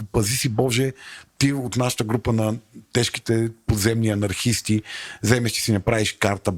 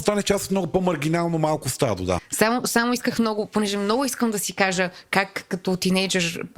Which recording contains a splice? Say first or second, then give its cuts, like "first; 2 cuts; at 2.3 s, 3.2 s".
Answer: second; 1 cut; at 2.2 s